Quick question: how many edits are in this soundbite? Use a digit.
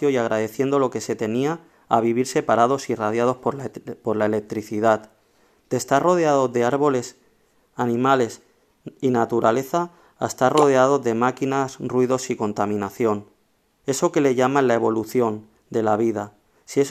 0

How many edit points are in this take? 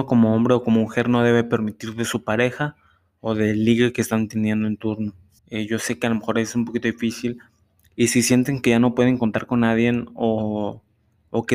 1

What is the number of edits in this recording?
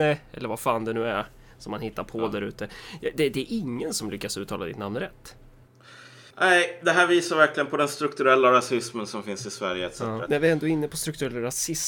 2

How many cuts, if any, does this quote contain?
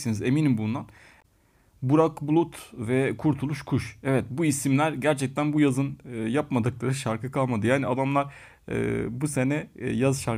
0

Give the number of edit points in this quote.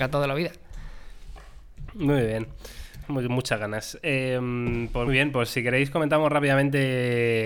2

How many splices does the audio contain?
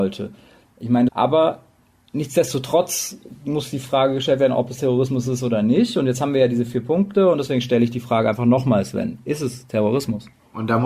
1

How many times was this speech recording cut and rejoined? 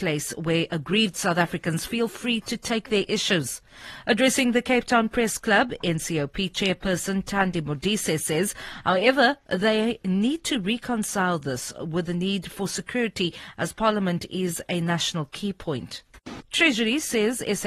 1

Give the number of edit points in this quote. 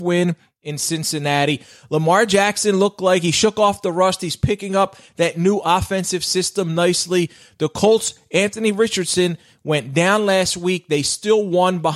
0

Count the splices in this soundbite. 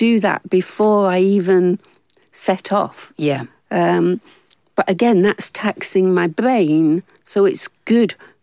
0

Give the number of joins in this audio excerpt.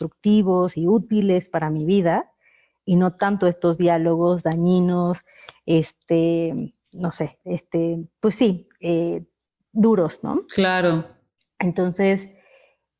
1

